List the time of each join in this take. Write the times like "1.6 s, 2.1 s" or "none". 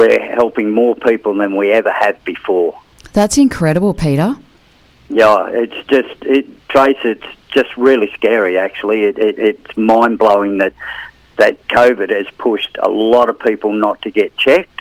none